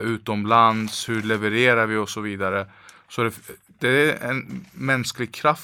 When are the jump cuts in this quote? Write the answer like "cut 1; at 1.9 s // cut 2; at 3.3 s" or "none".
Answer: none